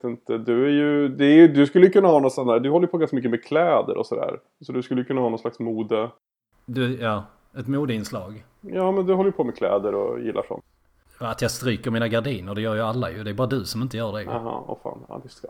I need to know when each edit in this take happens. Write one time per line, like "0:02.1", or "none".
none